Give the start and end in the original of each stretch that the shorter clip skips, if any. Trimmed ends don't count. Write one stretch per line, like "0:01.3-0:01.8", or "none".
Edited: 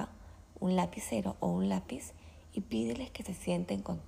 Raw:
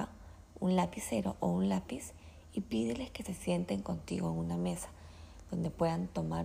none